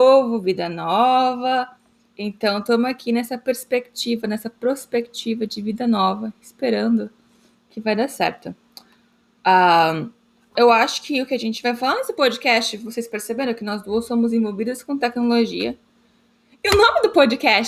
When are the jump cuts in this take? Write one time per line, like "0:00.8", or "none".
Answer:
0:10.6